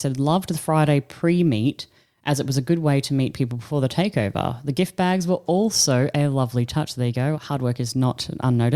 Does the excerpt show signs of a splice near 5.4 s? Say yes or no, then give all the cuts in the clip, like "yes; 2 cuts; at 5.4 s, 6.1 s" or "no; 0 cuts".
no; 1 cut; at 7.3 s